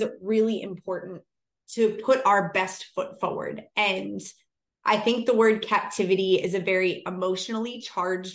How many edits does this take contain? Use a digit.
0